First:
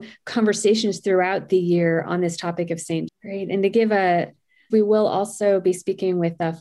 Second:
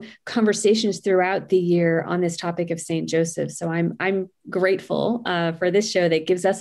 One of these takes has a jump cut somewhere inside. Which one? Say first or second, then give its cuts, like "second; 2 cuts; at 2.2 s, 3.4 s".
first; 2 cuts; at 3.1 s, 4.7 s